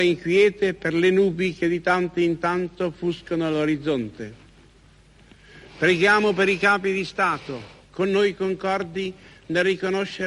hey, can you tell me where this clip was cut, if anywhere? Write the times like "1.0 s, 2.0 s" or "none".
none